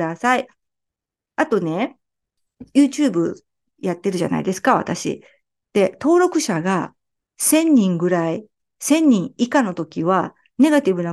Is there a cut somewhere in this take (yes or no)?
no